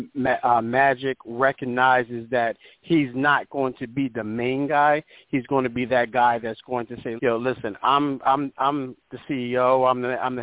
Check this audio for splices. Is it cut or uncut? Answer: cut